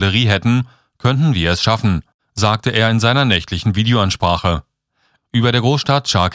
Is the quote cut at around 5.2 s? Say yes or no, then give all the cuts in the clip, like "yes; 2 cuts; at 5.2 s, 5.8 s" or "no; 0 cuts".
yes; 1 cut; at 5.2 s